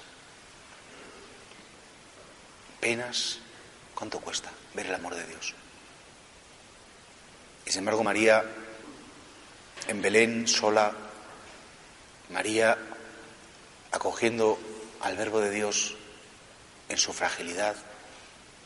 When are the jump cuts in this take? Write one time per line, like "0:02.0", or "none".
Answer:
none

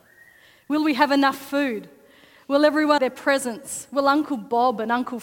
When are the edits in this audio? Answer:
0:03.0

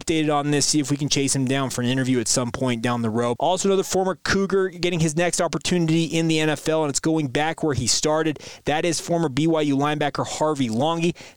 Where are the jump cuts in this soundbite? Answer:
0:03.4

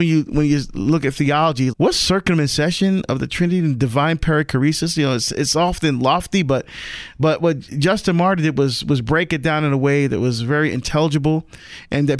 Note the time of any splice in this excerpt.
0:01.7

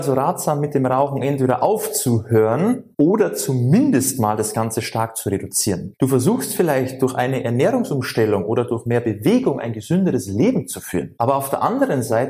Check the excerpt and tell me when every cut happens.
0:05.9

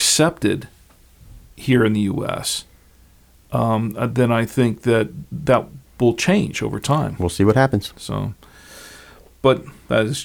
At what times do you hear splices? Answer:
none

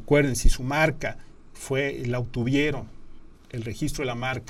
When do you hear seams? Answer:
none

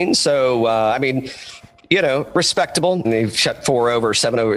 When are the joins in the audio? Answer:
0:03.0

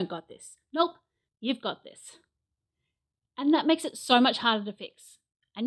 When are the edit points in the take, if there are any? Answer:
0:01.3

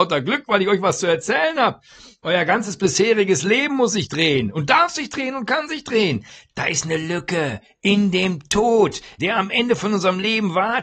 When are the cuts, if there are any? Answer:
0:06.5
0:09.2

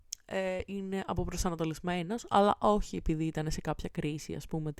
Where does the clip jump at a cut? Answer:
none

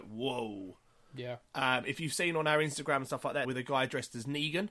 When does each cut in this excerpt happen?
0:03.4

